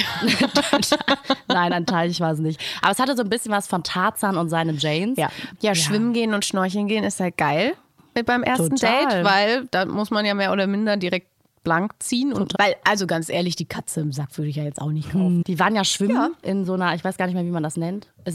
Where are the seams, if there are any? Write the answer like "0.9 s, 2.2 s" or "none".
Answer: 5.6 s, 12.5 s, 15.4 s